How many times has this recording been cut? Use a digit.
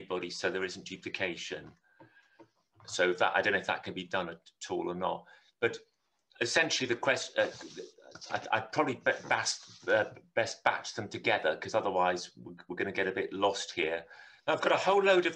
1